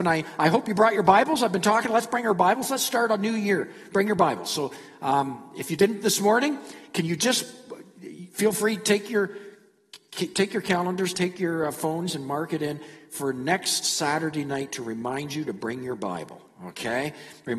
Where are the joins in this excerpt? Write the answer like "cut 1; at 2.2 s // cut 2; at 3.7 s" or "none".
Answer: none